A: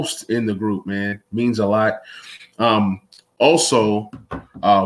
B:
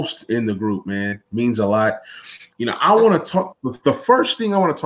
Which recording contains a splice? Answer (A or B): B